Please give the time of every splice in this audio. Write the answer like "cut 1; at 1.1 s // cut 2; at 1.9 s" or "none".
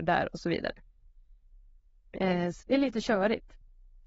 cut 1; at 2.6 s